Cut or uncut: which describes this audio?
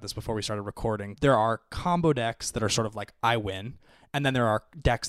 cut